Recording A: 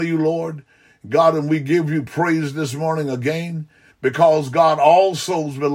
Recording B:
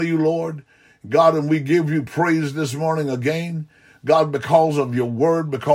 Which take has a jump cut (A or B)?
A